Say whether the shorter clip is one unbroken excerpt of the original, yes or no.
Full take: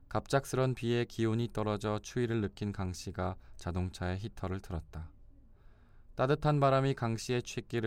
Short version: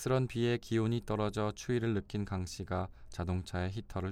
yes